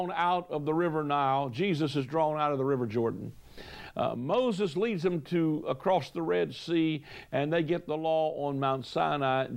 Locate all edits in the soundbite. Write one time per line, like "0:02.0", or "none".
none